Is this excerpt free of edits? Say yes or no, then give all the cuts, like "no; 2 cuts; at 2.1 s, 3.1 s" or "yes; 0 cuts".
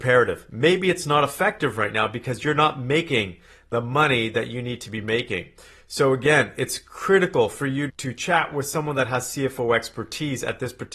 no; 1 cut; at 7.9 s